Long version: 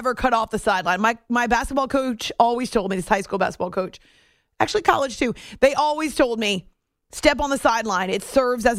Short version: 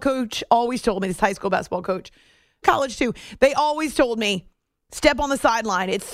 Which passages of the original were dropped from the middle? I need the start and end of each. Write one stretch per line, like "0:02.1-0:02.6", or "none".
0:04.5-0:04.8